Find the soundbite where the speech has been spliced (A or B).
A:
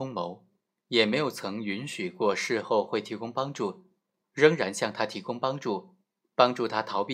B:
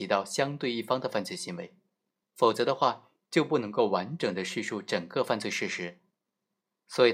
A